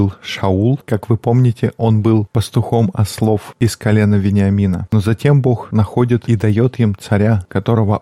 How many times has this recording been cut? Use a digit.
1